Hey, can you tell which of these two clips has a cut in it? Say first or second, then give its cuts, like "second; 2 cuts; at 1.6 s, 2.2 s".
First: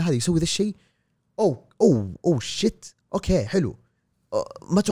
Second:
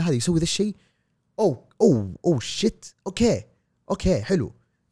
first; 1 cut; at 3.0 s